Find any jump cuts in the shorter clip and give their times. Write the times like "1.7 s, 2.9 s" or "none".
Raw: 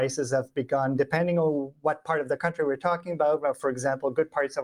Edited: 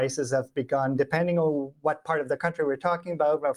none

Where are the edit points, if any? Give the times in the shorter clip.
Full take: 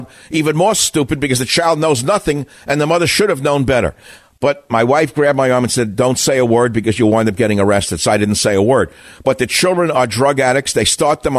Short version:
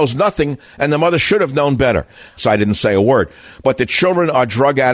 2.4 s

